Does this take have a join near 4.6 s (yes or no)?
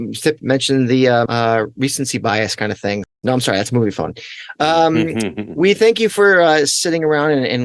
no